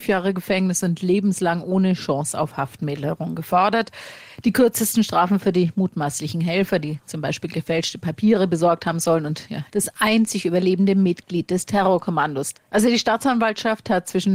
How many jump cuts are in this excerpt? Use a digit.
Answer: 2